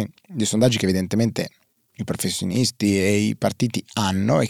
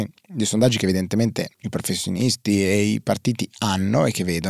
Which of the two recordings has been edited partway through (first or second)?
second